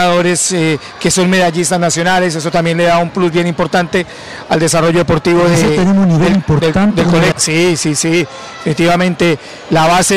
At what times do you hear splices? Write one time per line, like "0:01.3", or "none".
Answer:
0:07.3